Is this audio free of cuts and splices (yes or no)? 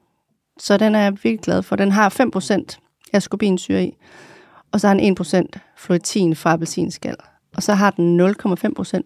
yes